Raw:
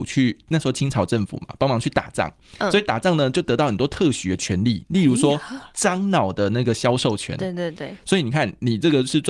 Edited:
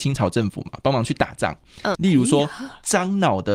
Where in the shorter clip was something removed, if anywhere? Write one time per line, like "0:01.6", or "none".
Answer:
0:01.9